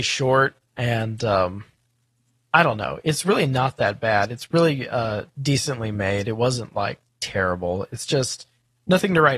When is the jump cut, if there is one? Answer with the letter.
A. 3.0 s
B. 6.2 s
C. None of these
C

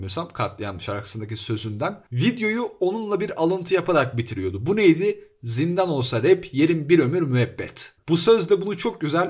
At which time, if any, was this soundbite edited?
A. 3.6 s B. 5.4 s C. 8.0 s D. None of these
C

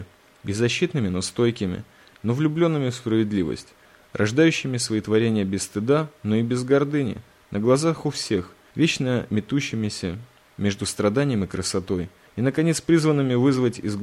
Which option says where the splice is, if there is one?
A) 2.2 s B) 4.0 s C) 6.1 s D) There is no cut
A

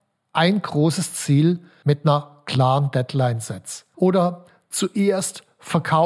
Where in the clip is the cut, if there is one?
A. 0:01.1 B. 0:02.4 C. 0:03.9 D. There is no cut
C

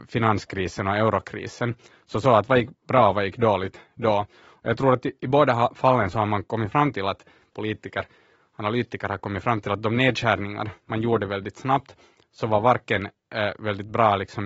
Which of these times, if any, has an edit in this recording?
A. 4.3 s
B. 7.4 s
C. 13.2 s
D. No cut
B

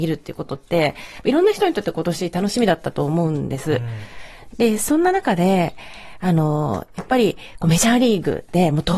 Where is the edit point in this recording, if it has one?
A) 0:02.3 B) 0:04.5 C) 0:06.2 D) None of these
B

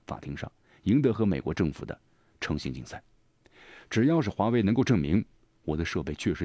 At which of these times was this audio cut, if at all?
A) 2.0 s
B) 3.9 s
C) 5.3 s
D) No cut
D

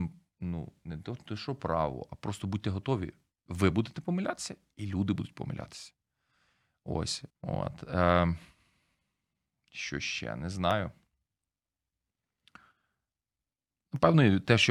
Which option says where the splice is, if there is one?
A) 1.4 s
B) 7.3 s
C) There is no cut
B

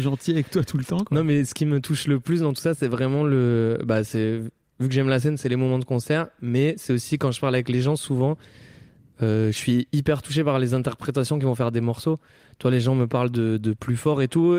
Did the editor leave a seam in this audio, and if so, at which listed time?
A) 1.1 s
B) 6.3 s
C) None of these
C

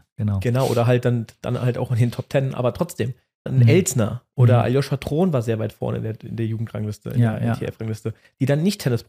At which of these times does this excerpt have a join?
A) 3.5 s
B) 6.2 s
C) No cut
A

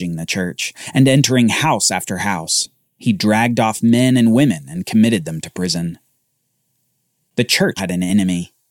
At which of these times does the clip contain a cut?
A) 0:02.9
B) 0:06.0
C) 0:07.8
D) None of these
C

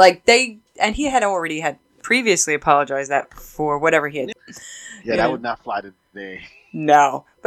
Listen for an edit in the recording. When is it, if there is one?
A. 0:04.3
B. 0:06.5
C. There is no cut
A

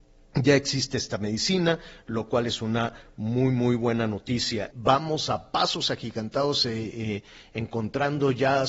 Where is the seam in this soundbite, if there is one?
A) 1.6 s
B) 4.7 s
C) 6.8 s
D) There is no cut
B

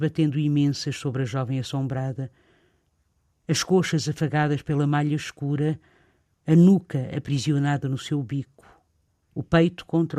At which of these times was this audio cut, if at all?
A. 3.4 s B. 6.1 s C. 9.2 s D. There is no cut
D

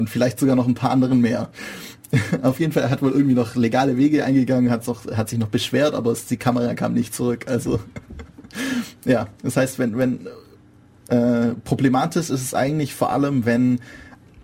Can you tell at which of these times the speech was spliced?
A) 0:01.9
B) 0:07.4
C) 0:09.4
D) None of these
C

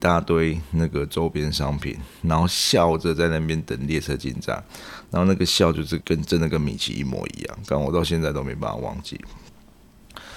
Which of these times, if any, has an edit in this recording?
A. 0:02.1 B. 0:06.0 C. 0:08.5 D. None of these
B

